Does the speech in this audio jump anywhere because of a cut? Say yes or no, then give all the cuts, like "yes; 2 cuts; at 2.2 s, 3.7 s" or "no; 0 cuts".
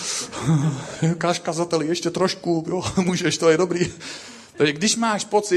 no; 0 cuts